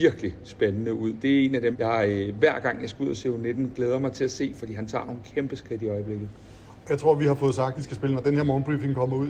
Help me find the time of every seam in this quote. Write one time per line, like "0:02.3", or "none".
0:01.7
0:07.7